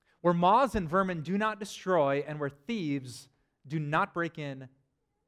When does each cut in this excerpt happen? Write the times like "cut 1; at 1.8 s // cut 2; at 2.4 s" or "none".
none